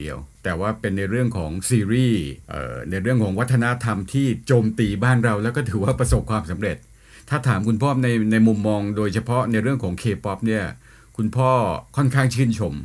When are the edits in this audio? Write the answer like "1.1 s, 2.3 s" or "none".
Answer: none

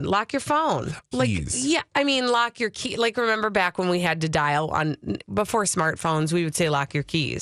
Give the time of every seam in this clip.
1.1 s

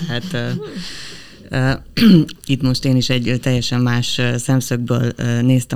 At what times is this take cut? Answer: 2.4 s

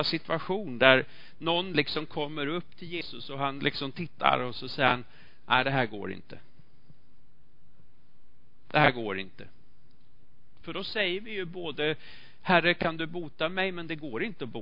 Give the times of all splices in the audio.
10.6 s

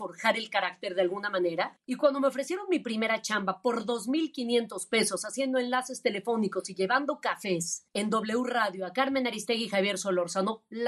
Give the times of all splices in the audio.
1.8 s

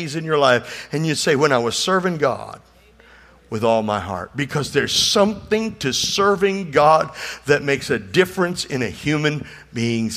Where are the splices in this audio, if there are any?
none

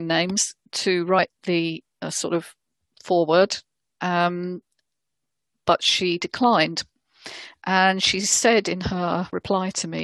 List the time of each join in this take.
none

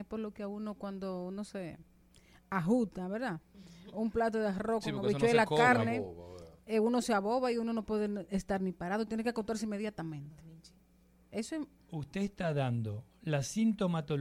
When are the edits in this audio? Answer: none

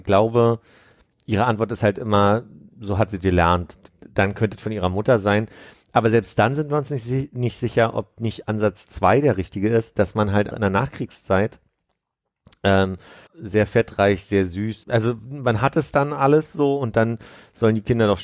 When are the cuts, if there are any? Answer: 10.5 s, 13.3 s, 14.8 s

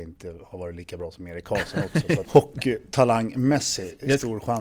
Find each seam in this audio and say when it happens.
2.2 s

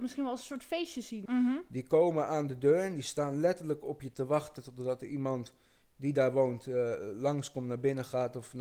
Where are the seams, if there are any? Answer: 1.3 s

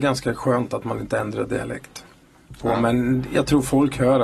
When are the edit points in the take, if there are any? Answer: 2.6 s

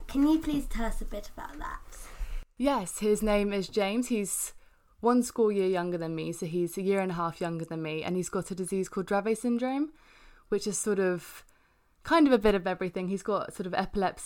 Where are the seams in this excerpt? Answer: none

